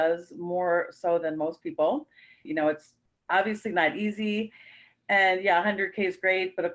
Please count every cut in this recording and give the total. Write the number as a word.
one